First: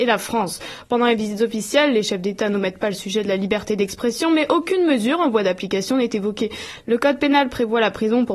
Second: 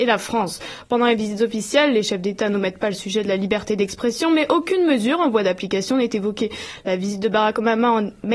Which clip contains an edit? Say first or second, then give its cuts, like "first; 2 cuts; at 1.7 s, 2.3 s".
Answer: first; 1 cut; at 6.8 s